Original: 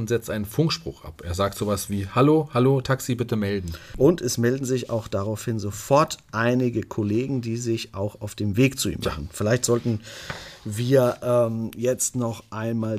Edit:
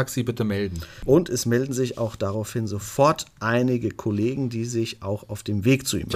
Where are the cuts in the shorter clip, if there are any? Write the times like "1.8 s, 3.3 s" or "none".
none